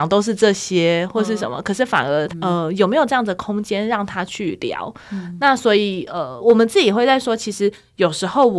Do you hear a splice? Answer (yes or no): no